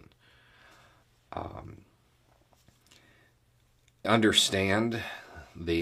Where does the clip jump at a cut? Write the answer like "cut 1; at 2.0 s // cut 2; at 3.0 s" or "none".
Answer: cut 1; at 4.0 s